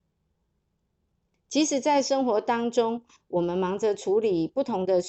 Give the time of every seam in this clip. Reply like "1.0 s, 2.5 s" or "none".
1.3 s